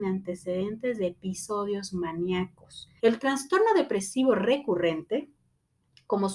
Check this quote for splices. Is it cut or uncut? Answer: cut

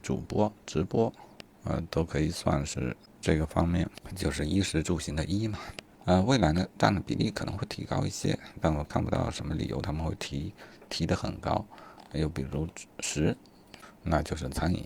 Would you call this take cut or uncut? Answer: cut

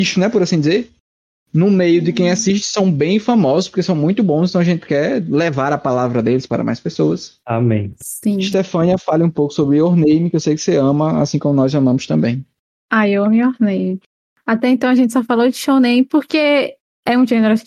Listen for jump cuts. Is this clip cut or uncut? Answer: uncut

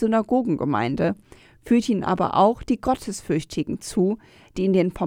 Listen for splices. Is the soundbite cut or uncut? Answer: uncut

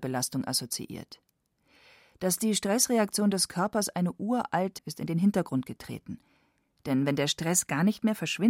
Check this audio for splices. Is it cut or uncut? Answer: cut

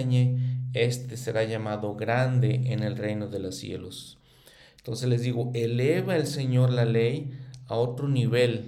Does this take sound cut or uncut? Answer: uncut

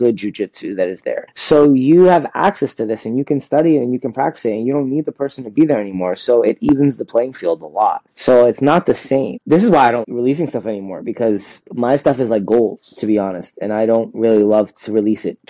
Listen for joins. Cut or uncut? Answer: cut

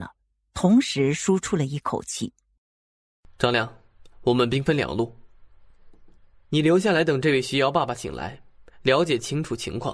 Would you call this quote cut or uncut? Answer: uncut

